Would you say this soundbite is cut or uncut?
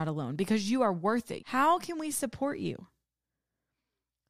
cut